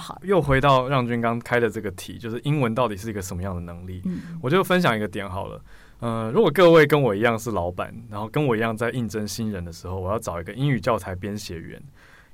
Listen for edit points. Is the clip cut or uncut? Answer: uncut